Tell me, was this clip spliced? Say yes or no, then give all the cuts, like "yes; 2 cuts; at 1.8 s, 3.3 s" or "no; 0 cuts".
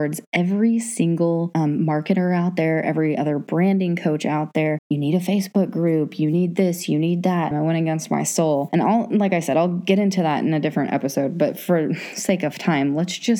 yes; 2 cuts; at 4.8 s, 7.5 s